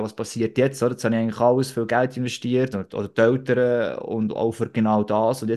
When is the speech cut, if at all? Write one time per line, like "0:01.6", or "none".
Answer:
0:02.7